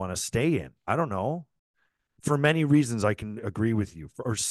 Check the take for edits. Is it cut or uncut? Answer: uncut